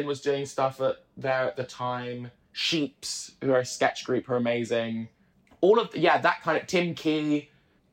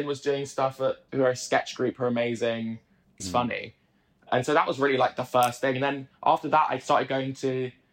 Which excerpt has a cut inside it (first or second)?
second